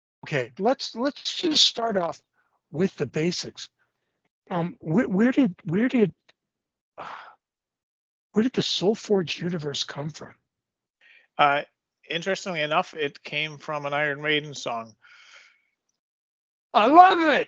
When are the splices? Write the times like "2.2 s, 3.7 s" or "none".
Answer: 4.8 s